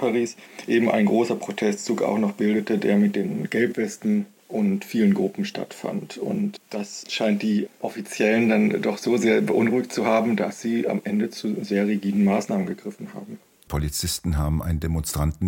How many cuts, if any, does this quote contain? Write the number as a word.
one